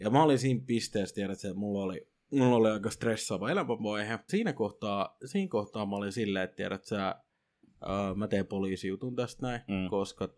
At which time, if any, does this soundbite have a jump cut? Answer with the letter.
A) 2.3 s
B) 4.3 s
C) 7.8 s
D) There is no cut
B